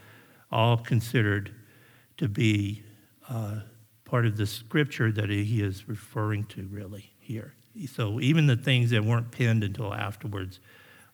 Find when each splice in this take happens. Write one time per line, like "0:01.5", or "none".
none